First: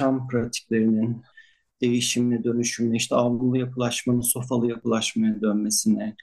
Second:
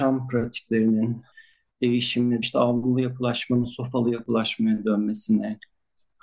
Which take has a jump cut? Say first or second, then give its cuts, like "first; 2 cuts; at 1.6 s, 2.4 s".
second; 1 cut; at 2.4 s